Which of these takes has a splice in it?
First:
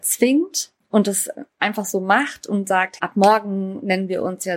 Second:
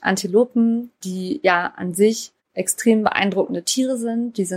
first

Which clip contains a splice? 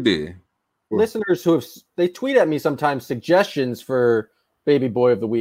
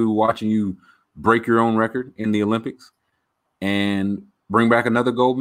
first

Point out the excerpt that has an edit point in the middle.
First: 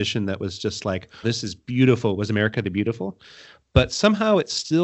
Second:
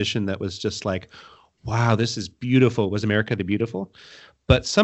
first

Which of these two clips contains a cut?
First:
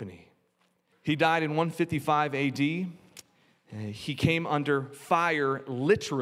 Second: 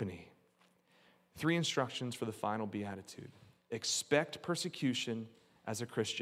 first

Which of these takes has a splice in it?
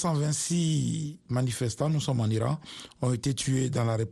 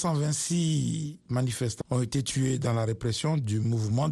second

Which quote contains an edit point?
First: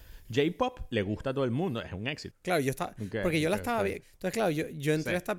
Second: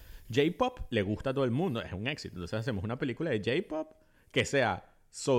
first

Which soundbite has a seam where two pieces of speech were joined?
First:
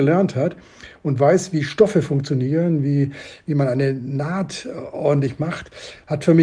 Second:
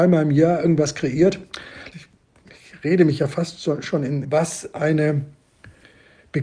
second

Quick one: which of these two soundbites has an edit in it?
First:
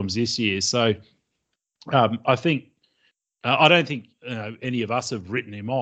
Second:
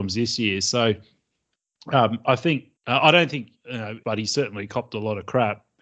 second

